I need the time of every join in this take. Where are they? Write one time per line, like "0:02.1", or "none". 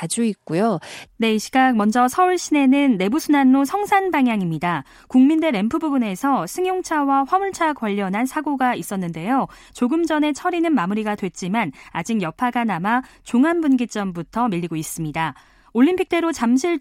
0:01.1